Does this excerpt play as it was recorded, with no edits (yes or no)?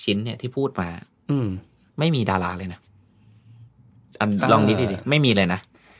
yes